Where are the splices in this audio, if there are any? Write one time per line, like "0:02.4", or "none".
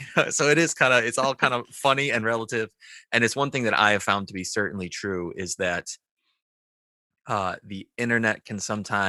none